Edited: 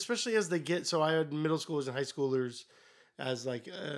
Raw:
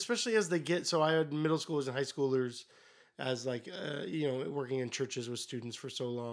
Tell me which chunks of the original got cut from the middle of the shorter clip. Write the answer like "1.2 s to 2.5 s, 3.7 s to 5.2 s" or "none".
none